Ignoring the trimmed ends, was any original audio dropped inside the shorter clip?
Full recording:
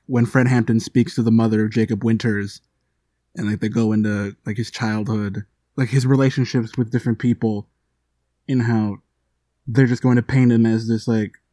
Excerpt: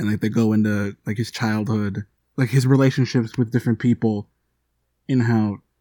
no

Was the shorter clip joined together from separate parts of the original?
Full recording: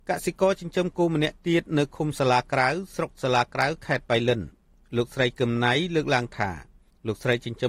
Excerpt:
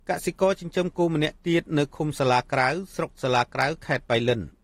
no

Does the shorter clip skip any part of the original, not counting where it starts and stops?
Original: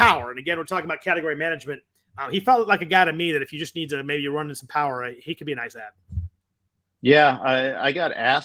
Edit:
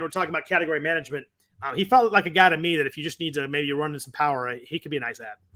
no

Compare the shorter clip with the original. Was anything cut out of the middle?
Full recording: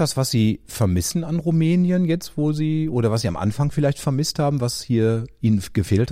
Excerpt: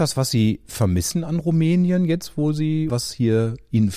yes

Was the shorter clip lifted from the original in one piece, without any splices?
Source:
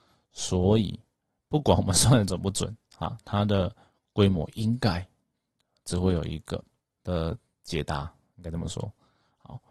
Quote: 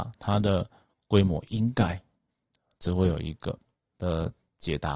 yes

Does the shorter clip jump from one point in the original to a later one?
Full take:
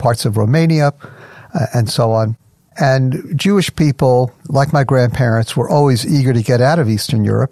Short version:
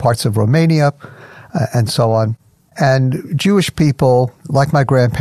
no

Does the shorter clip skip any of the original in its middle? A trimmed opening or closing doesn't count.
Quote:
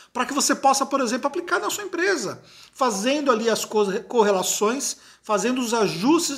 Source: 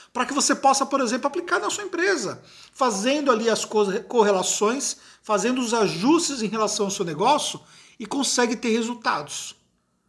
no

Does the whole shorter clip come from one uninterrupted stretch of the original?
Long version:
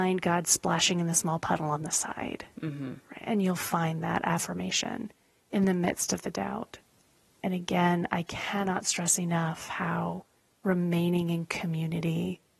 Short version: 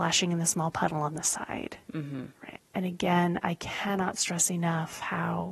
no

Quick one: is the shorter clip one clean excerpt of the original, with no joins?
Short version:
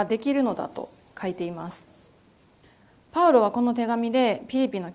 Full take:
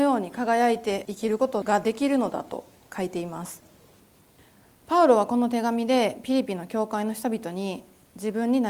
yes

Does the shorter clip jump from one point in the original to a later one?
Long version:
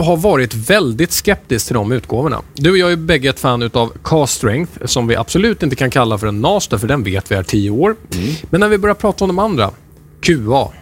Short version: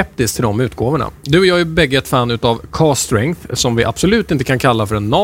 no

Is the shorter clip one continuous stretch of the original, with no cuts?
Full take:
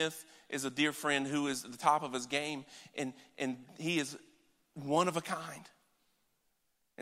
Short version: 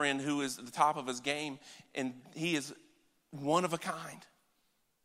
no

